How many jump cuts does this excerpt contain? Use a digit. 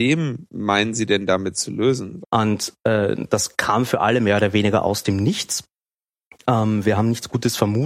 1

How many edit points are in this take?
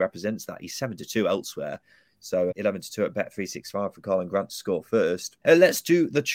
2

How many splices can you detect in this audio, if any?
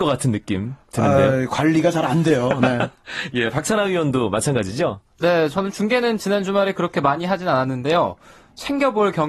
0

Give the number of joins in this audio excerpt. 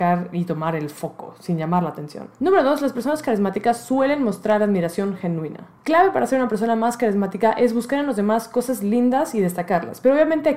0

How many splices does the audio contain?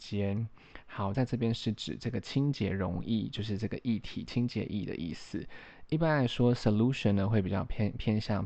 1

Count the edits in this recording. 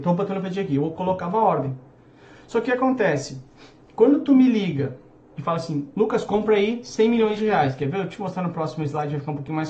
0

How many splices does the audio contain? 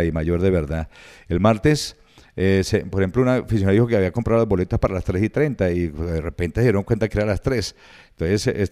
0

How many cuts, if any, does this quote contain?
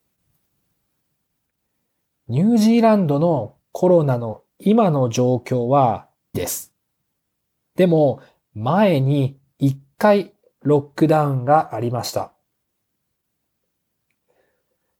1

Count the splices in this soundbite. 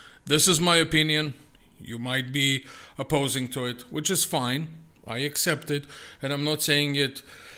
0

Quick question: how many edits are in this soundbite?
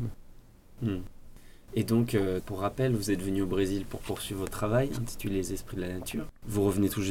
0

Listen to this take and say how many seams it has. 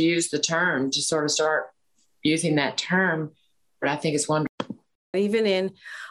1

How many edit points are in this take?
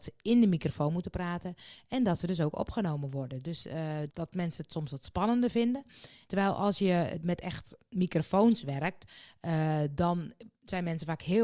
2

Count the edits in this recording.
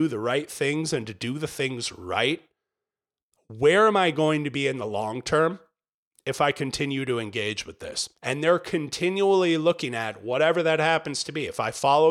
1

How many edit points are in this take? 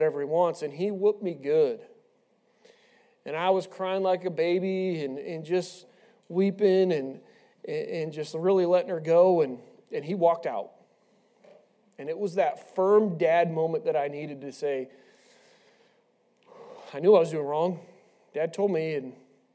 0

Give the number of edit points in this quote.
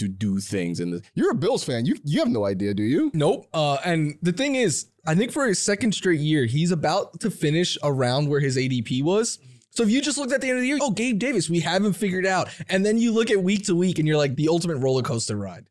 2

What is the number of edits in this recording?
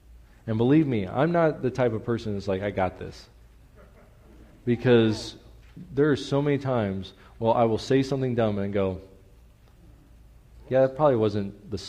0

